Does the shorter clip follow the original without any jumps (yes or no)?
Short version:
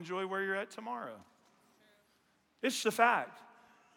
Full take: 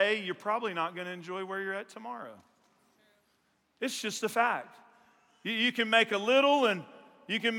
no